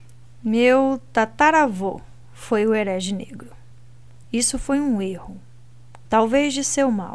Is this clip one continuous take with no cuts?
no; 2 cuts; at 4.2 s, 6.0 s

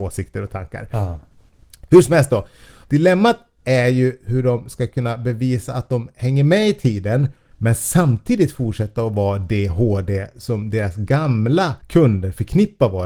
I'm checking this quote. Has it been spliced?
yes; 1 cut; at 2.8 s

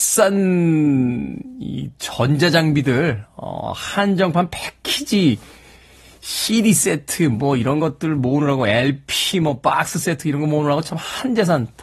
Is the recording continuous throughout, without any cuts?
yes; 0 cuts

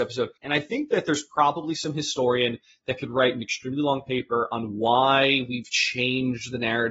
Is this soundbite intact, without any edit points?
yes; 0 cuts

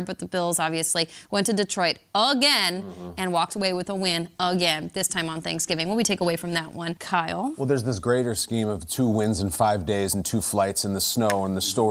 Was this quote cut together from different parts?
no; 0 cuts

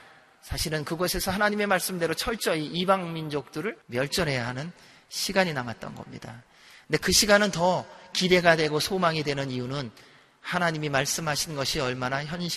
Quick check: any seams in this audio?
yes; 1 cut; at 3.8 s

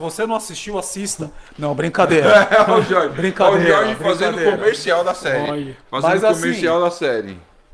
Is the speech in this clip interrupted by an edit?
no; 0 cuts

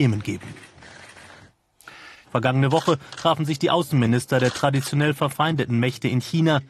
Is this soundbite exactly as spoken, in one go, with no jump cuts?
no; 1 cut; at 2.2 s

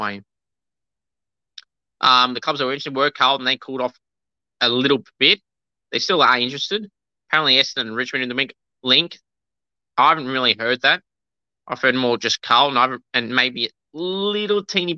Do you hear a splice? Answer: no; 0 cuts

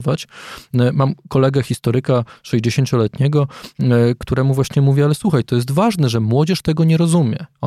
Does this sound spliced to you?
no; 0 cuts

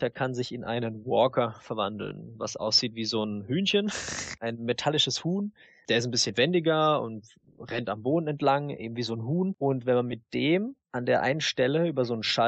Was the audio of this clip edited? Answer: yes; 1 cut; at 10.8 s

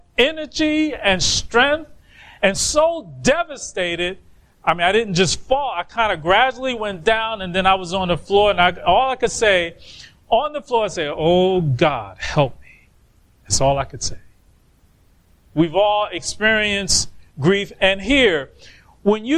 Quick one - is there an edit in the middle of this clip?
yes; 2 cuts; at 7.0 s, 15.5 s

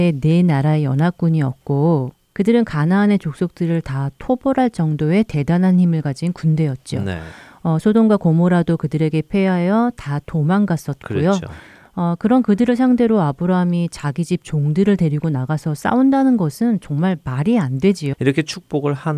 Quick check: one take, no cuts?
no; 1 cut; at 18.1 s

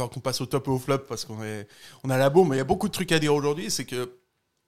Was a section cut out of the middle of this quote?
no; 0 cuts

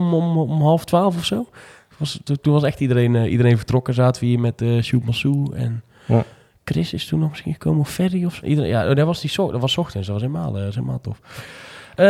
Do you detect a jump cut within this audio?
yes; 1 cut; at 8.4 s

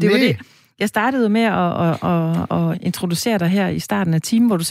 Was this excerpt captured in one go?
no; 1 cut; at 2.7 s

